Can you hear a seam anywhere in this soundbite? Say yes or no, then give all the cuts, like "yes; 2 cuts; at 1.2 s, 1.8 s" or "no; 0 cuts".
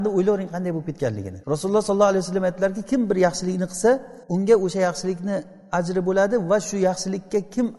yes; 2 cuts; at 1.4 s, 4.2 s